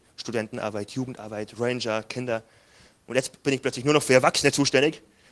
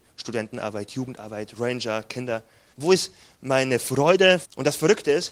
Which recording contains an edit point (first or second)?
second